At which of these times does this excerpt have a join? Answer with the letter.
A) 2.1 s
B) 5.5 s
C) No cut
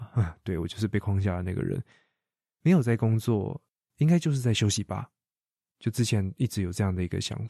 C